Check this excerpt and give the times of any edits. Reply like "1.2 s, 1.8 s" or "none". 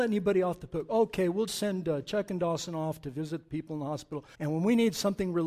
1.5 s, 4.3 s